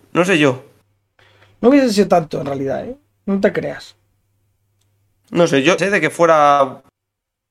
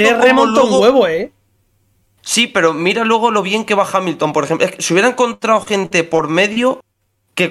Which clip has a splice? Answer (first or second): first